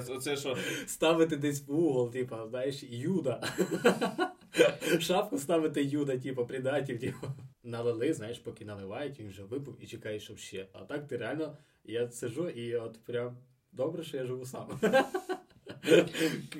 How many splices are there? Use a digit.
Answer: 2